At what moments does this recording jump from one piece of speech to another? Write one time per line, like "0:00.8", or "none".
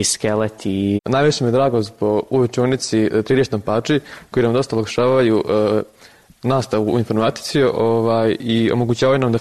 0:01.0